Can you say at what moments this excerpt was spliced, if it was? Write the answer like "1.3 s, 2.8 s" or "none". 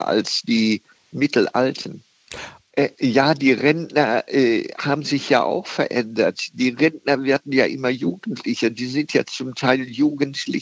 2.7 s

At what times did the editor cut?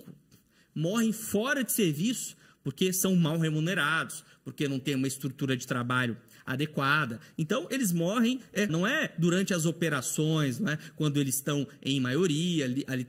8.7 s

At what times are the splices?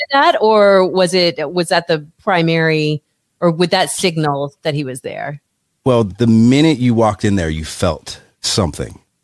none

